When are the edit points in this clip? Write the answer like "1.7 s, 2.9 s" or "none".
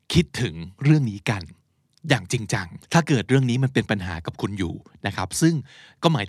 2.8 s